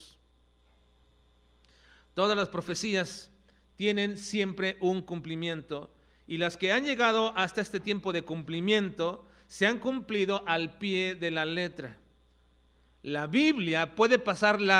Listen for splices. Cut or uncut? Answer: uncut